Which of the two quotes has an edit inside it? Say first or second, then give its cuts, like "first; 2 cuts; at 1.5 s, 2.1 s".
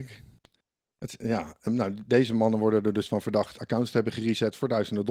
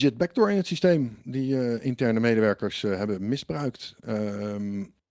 first; 1 cut; at 1.7 s